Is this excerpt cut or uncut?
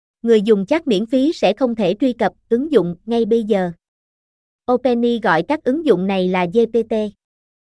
uncut